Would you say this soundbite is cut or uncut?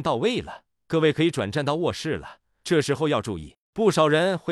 uncut